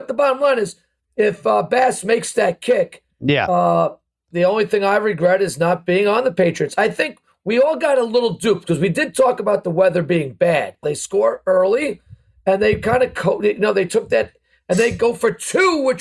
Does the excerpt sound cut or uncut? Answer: cut